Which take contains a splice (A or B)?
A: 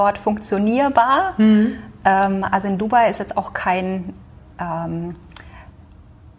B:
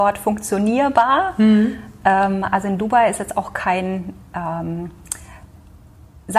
B